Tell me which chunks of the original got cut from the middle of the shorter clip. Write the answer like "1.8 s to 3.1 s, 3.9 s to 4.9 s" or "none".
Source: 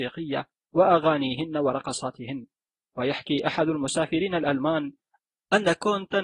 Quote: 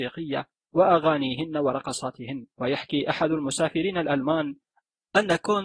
2.5 s to 2.9 s